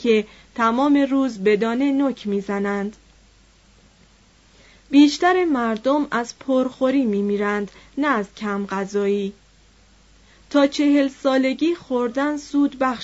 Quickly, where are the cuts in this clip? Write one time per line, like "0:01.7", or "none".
none